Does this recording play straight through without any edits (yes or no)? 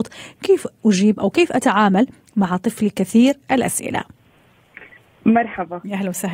yes